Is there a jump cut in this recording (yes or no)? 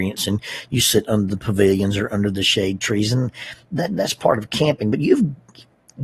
no